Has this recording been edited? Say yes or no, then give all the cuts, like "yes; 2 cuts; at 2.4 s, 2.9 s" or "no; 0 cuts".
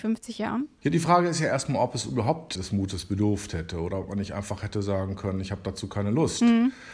yes; 1 cut; at 2.5 s